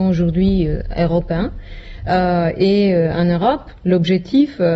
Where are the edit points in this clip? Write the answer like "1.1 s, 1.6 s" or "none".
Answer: none